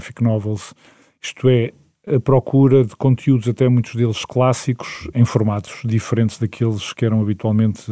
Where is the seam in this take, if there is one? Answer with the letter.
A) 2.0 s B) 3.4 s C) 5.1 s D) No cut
C